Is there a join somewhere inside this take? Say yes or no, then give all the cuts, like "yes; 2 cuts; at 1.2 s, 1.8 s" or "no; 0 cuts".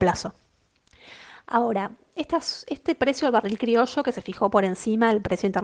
no; 0 cuts